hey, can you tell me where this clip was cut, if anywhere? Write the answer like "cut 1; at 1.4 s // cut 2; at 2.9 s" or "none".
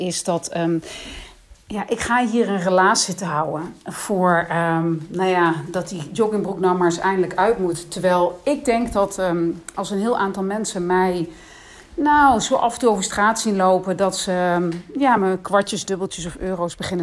none